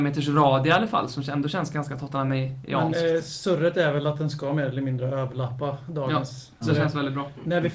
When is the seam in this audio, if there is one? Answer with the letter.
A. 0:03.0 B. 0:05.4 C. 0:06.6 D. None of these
C